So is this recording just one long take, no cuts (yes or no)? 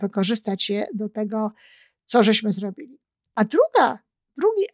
yes